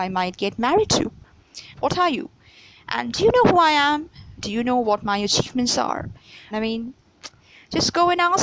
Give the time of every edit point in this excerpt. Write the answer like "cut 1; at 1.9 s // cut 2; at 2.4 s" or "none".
cut 1; at 1.7 s // cut 2; at 6.5 s